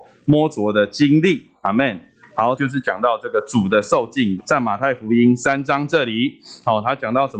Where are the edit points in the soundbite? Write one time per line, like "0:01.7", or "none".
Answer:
0:02.6
0:04.4